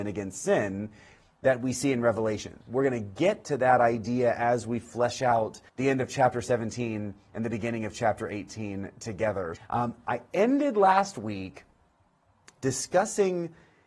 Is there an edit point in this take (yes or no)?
yes